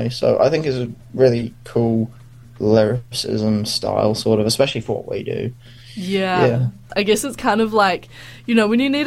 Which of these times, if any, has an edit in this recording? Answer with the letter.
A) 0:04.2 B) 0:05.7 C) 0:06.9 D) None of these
C